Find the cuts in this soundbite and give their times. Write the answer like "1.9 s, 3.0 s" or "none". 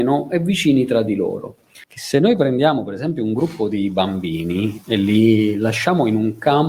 1.8 s